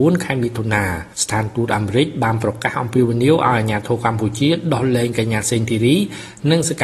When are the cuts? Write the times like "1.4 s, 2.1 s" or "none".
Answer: 1.1 s